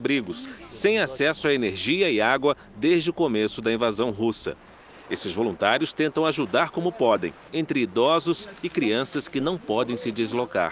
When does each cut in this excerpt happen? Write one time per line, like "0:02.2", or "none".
0:07.5